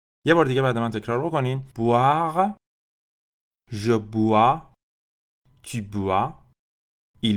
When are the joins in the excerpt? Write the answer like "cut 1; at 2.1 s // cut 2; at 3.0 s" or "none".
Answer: none